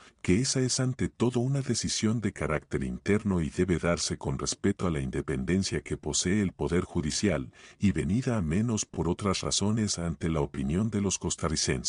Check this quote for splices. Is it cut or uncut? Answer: uncut